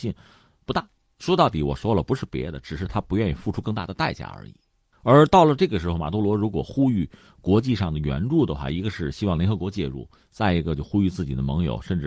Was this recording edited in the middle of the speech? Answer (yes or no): no